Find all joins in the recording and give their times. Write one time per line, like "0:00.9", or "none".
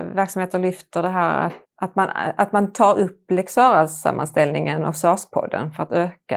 0:01.6